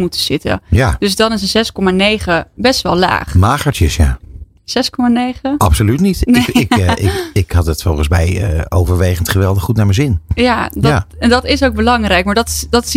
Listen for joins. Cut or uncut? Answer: cut